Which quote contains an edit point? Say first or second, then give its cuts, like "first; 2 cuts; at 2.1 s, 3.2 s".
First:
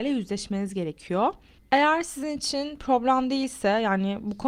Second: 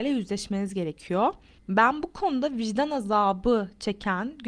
second; 1 cut; at 1.7 s